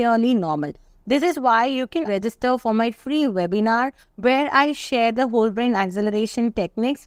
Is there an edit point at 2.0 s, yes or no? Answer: yes